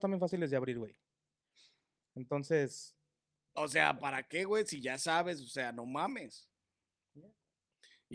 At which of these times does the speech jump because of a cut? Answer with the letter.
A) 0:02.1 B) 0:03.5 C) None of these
B